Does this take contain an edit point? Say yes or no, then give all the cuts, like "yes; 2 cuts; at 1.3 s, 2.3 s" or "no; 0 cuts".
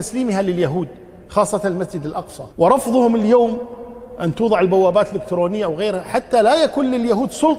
yes; 1 cut; at 2.5 s